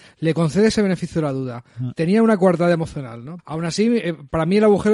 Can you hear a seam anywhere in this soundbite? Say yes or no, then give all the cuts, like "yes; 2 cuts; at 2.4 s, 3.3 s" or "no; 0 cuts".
yes; 1 cut; at 3.4 s